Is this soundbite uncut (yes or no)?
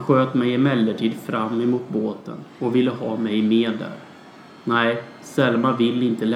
yes